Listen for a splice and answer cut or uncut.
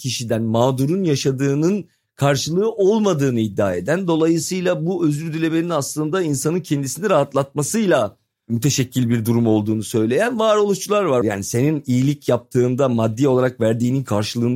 cut